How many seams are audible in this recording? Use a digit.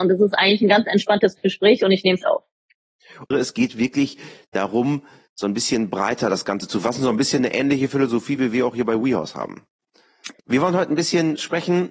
3